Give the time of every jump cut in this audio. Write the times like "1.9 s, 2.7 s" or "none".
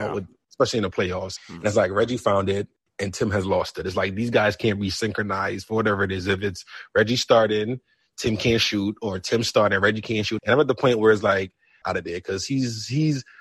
1.4 s, 10.4 s, 11.8 s